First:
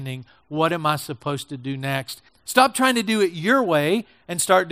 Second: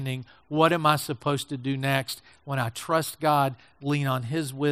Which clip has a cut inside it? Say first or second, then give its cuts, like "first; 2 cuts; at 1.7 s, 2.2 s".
first; 1 cut; at 2.3 s